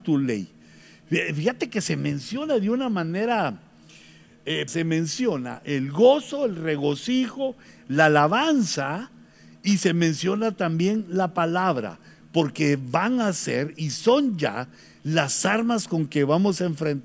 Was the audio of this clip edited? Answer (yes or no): yes